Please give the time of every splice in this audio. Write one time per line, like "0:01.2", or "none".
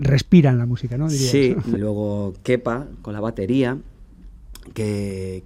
0:01.8